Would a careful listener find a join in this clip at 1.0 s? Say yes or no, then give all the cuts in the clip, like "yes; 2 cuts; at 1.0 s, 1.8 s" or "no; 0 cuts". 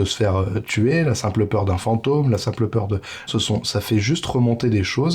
no; 1 cut; at 3.3 s